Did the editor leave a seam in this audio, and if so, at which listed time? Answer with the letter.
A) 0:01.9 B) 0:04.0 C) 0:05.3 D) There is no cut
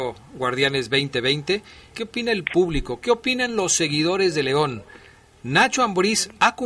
A